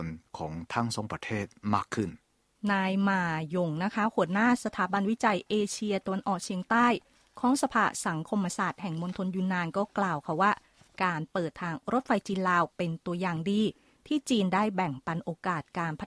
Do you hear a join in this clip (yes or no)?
no